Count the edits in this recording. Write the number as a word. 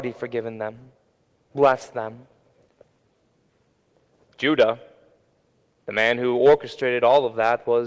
zero